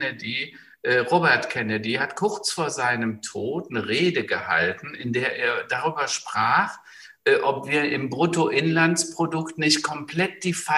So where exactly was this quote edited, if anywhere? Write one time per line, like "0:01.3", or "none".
none